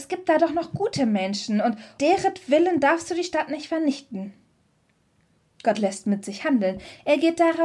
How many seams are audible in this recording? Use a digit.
1